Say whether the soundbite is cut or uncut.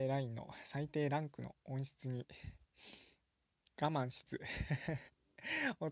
cut